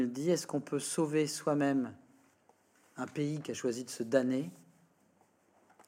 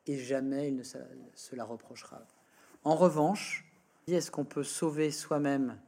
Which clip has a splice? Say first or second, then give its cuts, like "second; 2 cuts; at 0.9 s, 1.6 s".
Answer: second; 1 cut; at 4.1 s